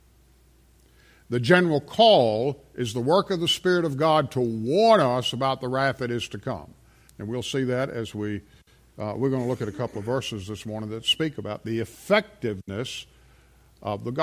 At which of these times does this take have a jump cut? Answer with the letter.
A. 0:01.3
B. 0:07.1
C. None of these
B